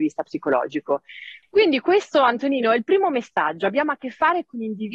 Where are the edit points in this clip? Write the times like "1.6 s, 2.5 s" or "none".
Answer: 1.4 s